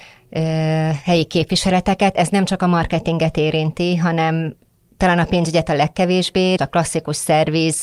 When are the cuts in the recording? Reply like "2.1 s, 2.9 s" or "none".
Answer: 6.6 s